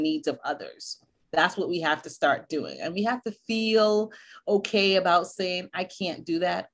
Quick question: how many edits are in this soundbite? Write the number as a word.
one